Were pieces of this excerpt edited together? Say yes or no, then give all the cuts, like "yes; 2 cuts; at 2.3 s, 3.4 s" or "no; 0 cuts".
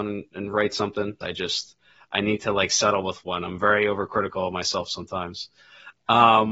yes; 1 cut; at 1.2 s